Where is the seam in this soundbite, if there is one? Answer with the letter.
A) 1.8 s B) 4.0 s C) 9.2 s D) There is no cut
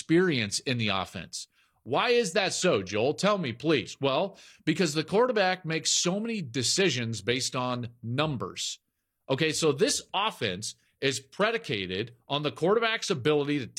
D